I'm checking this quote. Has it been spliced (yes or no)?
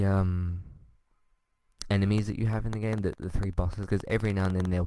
yes